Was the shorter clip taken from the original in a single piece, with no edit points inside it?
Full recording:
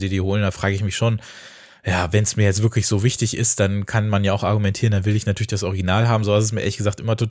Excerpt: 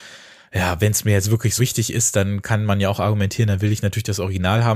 no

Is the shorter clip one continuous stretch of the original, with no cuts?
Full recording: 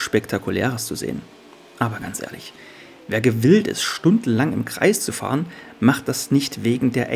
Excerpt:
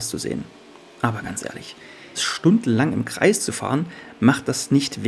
no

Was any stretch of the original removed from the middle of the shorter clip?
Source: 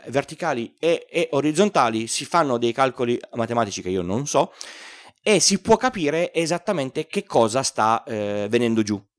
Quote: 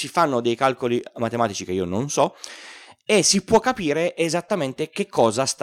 no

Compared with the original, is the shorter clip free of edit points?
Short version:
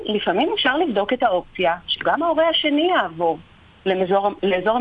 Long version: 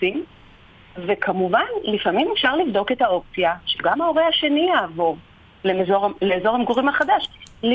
yes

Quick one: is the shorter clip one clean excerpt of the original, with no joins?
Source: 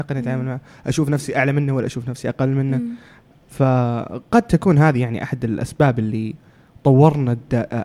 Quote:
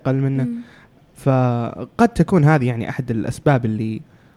yes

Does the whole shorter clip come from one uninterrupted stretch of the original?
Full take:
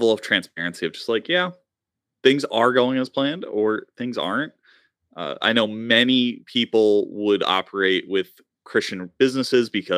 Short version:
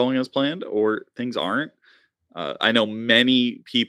yes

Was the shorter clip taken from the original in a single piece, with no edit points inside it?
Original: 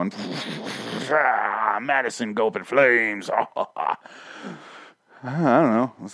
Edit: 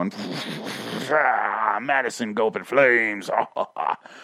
yes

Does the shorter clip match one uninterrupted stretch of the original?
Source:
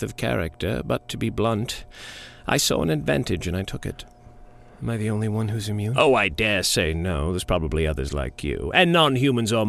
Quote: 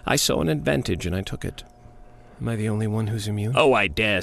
yes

